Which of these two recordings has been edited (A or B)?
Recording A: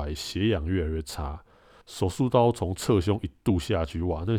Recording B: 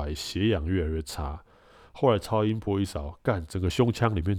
A